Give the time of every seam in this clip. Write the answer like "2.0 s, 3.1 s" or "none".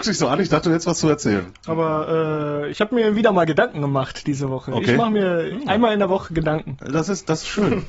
1.5 s